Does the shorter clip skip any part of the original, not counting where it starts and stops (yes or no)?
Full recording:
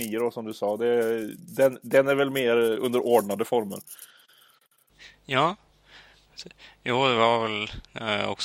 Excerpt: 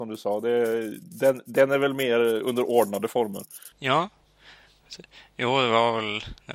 yes